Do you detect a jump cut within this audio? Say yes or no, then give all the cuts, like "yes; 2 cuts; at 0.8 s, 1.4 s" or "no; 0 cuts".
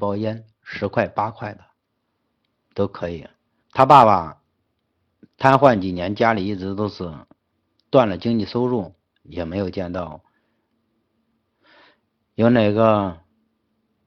yes; 1 cut; at 3.6 s